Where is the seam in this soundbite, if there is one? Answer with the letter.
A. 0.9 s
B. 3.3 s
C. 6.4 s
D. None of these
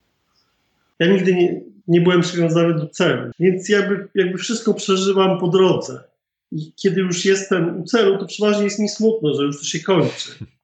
B